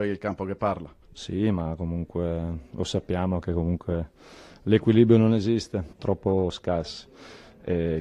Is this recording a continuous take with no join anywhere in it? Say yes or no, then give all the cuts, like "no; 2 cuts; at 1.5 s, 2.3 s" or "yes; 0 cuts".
no; 2 cuts; at 1.0 s, 5.9 s